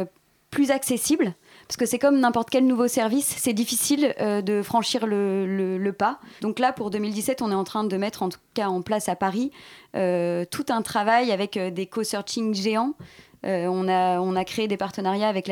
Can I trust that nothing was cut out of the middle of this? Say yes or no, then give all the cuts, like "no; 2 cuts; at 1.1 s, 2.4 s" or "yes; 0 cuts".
no; 1 cut; at 6.4 s